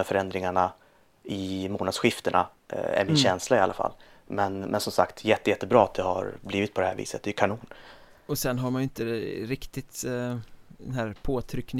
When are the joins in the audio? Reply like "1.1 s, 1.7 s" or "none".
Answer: none